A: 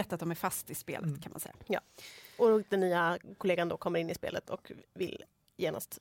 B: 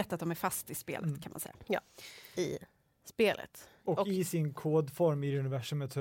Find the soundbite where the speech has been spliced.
B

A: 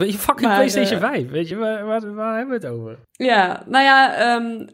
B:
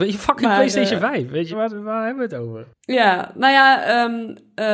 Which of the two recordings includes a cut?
B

